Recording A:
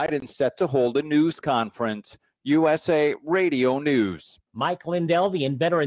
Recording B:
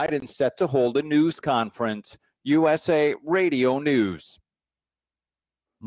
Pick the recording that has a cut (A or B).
A